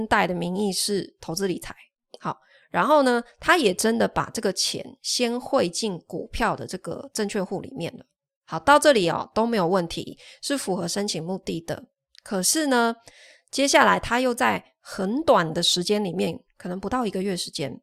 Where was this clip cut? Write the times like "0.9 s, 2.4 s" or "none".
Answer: none